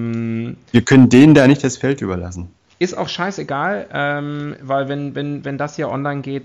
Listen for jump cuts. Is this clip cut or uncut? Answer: cut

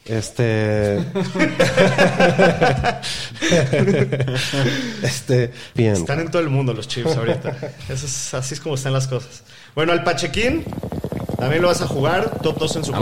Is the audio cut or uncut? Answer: cut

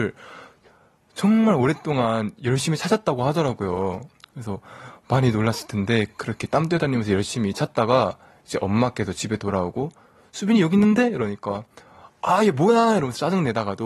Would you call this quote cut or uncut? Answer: uncut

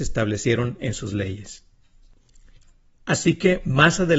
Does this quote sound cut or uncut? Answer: uncut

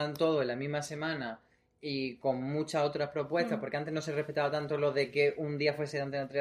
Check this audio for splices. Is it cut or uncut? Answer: uncut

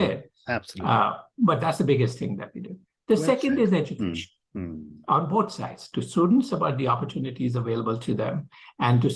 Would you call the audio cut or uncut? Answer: uncut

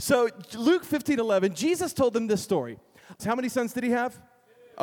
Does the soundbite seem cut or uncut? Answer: cut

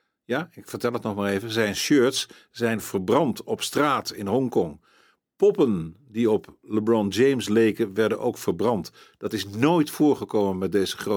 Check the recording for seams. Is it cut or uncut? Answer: uncut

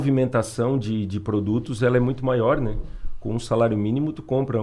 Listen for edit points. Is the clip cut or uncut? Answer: uncut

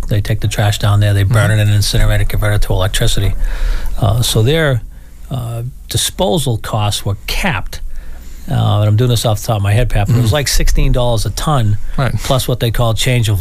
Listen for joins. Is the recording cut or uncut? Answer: uncut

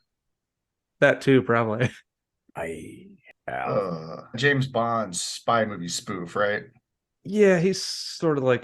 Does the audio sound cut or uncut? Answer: cut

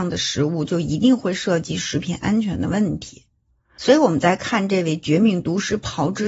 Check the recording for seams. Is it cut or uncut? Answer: uncut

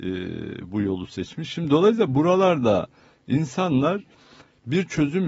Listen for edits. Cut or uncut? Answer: uncut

